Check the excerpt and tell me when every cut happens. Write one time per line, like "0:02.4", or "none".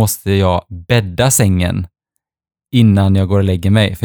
none

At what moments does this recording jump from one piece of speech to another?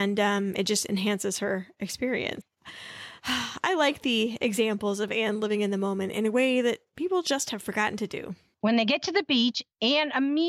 0:02.4

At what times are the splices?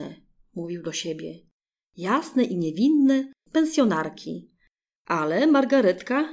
0:03.5
0:05.0

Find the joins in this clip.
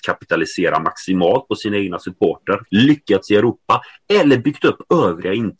0:02.7

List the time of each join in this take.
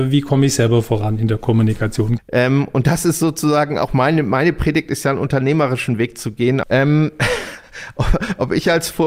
0:02.2
0:06.6

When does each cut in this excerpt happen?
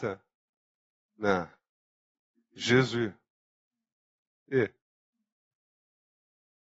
0:04.3

